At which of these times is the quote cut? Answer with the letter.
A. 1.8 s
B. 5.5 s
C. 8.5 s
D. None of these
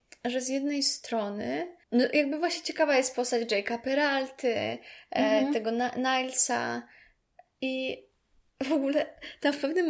A